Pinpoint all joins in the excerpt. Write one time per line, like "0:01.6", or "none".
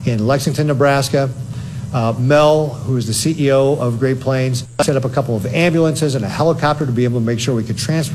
none